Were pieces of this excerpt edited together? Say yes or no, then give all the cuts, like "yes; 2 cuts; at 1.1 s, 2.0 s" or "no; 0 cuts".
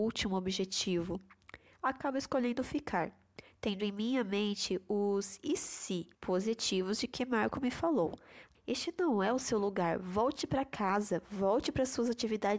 yes; 2 cuts; at 6.1 s, 8.5 s